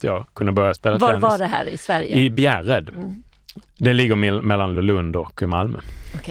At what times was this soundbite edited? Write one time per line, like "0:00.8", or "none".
0:03.7

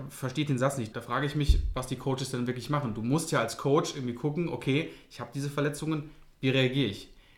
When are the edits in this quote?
0:00.9

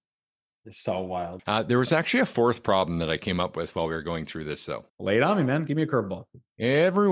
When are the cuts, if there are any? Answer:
0:01.4
0:04.9

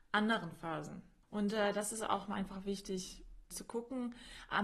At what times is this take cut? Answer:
0:01.2
0:03.5

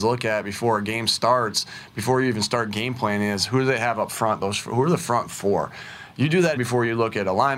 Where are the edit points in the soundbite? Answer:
0:06.6

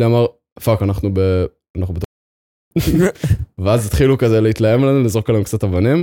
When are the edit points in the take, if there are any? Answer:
none

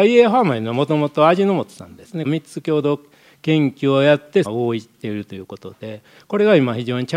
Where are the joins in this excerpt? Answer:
0:02.2
0:04.4

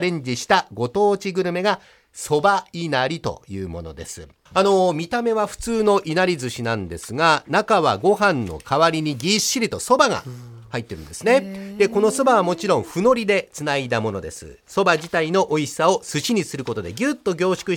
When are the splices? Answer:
0:04.5

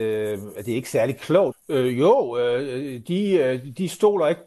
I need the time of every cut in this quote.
0:01.5

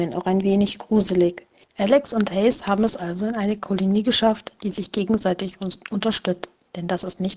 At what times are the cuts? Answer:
0:01.6

